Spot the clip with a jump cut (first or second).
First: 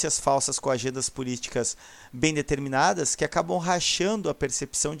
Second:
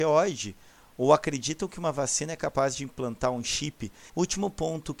second